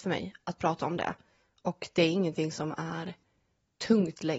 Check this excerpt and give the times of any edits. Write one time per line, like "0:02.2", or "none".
none

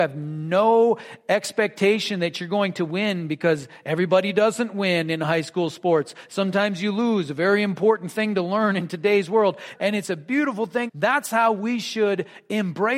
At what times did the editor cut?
0:09.7
0:10.9

